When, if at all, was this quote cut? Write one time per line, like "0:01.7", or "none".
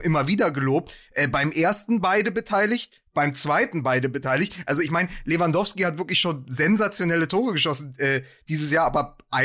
none